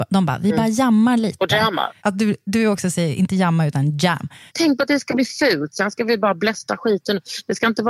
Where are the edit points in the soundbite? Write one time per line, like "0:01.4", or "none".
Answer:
0:02.0
0:04.5